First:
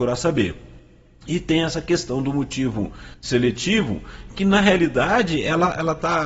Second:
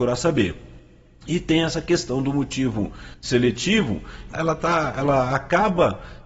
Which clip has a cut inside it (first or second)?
second